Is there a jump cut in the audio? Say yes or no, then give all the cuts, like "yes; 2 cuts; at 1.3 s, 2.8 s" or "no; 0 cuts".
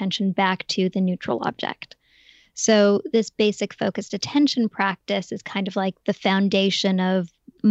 no; 0 cuts